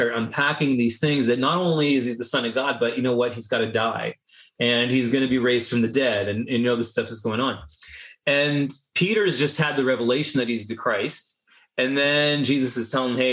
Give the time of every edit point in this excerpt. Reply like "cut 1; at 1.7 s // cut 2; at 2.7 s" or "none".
none